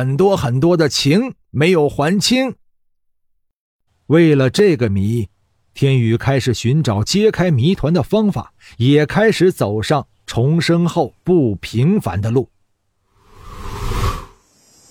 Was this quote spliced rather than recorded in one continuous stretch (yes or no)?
yes